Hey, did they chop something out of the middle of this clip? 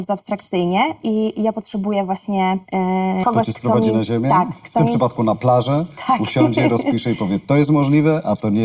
yes; 1 cut; at 3.2 s

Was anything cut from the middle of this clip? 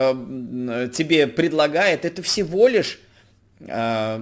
no; 0 cuts

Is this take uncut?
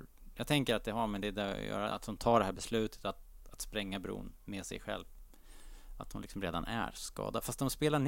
yes; 0 cuts

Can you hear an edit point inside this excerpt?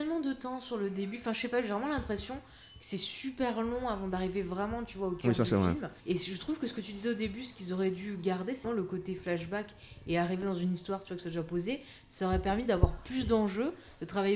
yes; 2 cuts; at 6.0 s, 8.6 s

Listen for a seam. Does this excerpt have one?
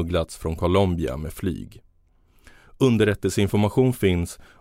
no; 0 cuts

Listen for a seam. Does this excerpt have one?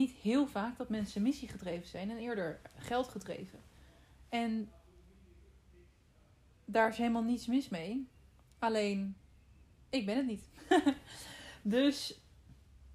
no; 0 cuts

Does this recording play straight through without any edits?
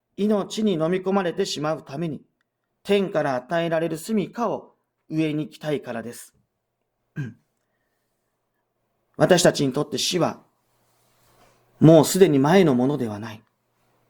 yes; 0 cuts

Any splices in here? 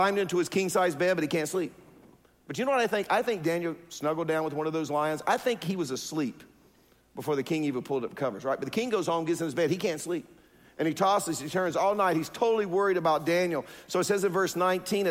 no; 0 cuts

